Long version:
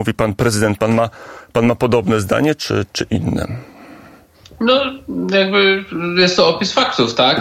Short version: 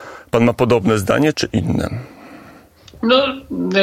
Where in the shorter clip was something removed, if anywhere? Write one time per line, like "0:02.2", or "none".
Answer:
0:01.3